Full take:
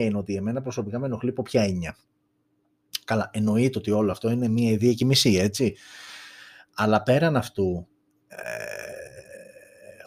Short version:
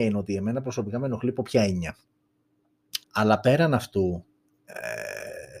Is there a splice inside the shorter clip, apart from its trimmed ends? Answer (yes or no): yes